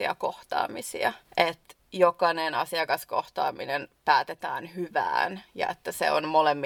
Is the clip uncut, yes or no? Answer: no